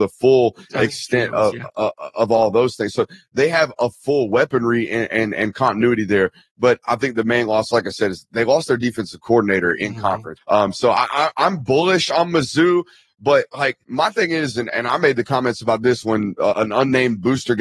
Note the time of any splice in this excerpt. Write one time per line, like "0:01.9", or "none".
0:10.4
0:13.8
0:16.5

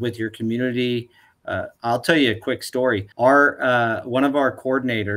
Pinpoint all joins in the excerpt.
0:03.1

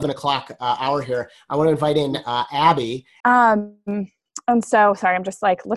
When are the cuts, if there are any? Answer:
0:03.2

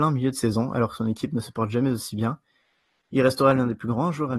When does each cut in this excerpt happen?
none

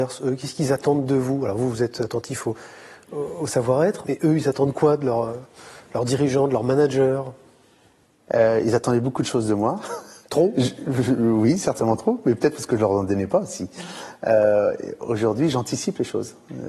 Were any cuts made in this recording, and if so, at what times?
0:04.0

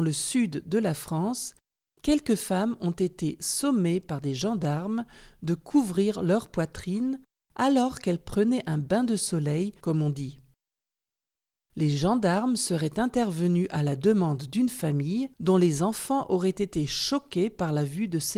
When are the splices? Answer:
0:09.8
0:15.3

